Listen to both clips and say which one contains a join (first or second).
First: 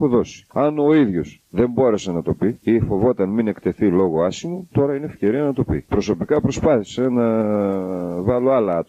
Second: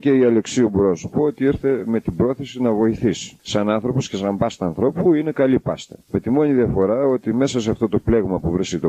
first